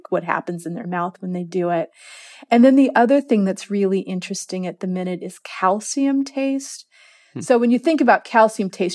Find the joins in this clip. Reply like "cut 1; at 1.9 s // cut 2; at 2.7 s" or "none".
none